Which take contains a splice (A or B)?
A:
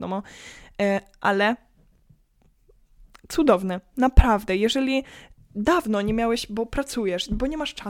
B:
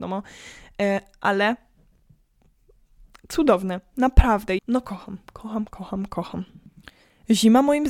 B